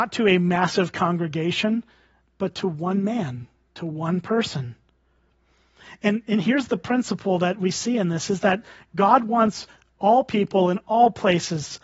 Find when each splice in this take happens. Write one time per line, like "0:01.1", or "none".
none